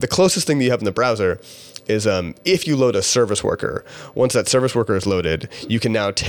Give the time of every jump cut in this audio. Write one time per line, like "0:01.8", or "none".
none